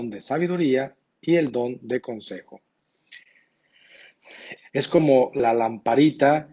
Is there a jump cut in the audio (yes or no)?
yes